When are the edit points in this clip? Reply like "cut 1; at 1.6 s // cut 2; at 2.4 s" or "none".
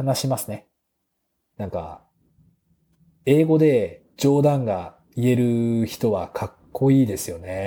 cut 1; at 1.5 s // cut 2; at 4.1 s